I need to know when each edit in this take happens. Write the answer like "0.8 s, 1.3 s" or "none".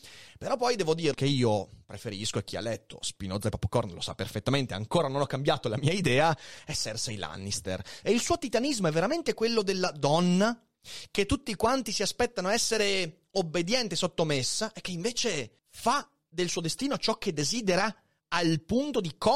1.1 s, 8.0 s, 15.6 s